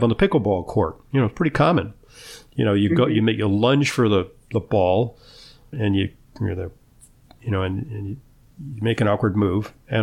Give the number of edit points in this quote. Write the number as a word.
one